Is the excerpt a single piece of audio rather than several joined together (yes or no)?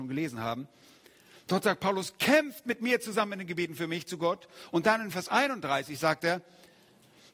yes